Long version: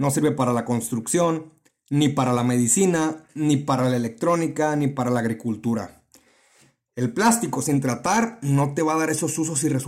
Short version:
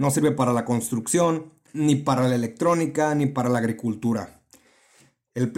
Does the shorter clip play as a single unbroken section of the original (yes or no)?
no